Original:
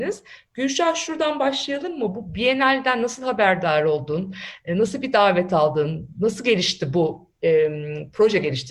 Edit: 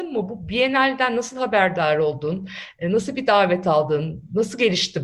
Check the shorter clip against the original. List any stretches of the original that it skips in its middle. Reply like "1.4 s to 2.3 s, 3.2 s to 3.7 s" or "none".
none